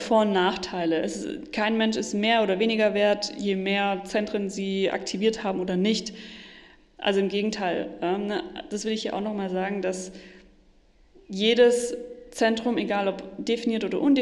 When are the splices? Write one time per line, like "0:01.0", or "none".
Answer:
none